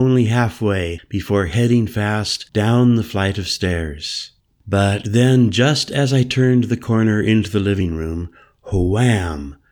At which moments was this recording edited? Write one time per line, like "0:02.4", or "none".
none